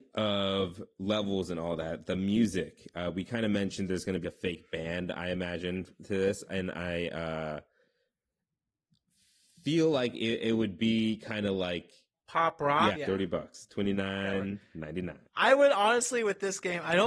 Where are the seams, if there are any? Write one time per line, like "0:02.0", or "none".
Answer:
0:04.2
0:12.9
0:15.3